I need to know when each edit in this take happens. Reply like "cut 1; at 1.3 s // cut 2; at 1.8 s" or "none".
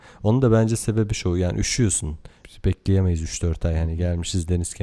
cut 1; at 2.4 s